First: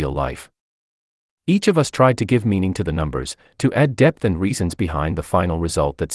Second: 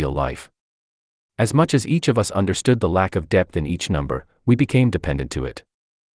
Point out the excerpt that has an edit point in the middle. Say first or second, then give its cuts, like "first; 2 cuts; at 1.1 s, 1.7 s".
first; 1 cut; at 1.3 s